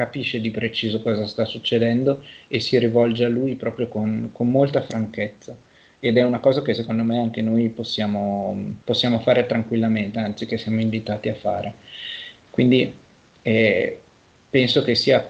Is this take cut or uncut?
cut